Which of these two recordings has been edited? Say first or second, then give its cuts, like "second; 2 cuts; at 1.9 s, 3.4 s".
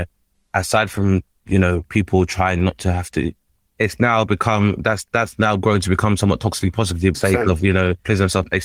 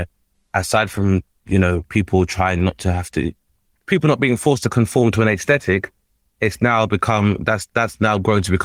first; 2 cuts; at 3.7 s, 7.1 s